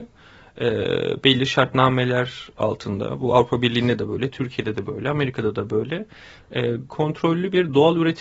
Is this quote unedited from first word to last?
no; 1 cut; at 6.9 s

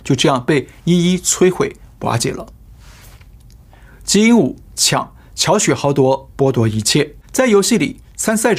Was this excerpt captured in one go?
no; 1 cut; at 7.2 s

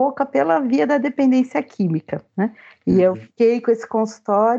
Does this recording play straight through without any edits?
yes; 0 cuts

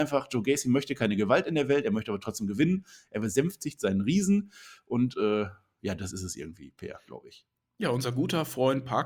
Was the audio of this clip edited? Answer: no; 0 cuts

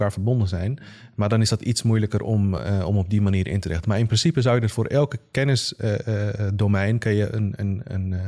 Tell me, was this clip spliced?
no; 0 cuts

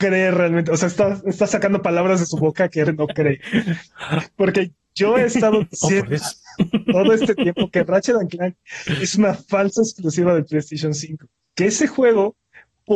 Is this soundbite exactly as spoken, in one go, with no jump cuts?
no; 2 cuts; at 2.8 s, 11.4 s

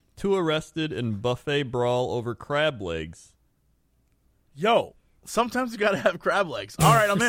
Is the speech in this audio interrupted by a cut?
no; 0 cuts

